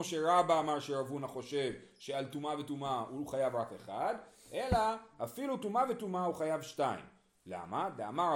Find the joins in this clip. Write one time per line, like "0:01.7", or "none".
none